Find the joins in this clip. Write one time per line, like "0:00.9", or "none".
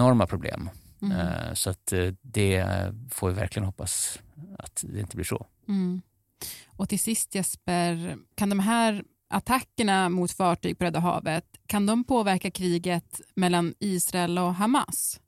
none